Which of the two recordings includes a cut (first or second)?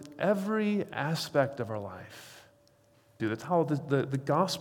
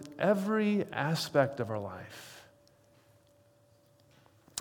first